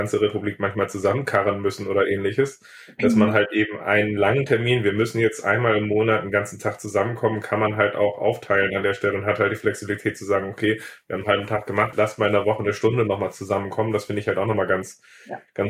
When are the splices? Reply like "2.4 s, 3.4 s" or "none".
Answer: 11.9 s